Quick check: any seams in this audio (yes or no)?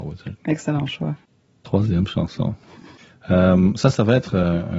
no